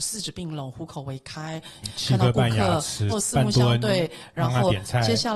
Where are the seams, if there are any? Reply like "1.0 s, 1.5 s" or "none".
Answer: 1.8 s, 3.1 s